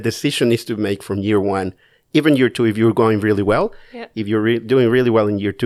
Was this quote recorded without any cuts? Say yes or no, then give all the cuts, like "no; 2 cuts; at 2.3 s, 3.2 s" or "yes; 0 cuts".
yes; 0 cuts